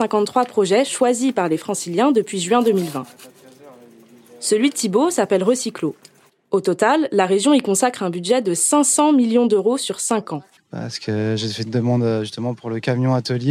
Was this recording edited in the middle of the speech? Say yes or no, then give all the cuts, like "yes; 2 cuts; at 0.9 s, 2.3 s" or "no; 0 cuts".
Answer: yes; 2 cuts; at 6.3 s, 10.6 s